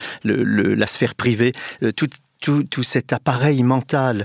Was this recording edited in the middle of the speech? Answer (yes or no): no